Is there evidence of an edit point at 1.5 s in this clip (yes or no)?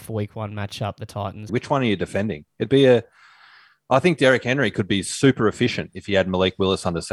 yes